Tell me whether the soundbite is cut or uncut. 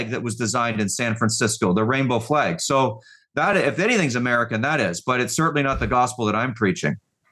uncut